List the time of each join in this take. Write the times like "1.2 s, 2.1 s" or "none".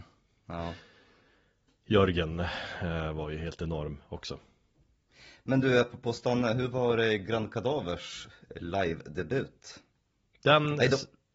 none